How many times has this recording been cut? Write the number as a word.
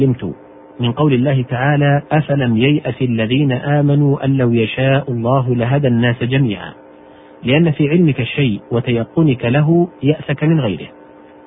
one